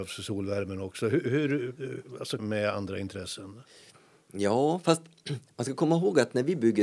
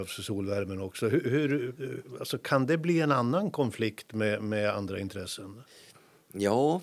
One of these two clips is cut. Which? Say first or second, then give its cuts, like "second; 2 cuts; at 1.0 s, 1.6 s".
first; 1 cut; at 2.4 s